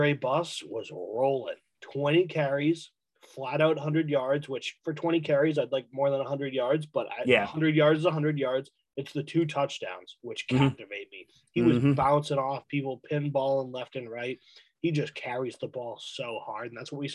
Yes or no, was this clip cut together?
no